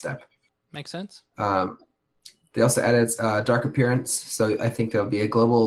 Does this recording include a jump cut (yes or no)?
no